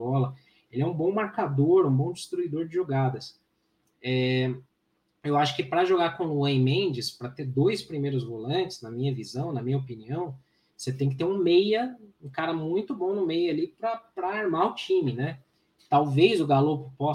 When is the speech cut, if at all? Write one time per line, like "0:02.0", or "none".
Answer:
none